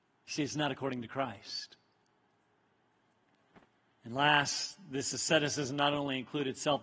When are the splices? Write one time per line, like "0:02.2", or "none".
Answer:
none